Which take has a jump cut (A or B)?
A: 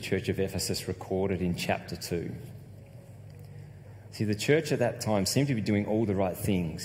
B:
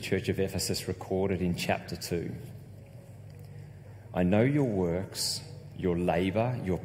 A